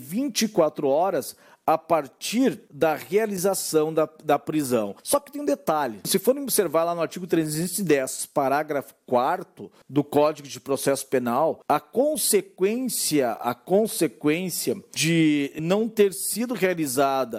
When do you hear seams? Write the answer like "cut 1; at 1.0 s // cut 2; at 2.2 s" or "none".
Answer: cut 1; at 5.0 s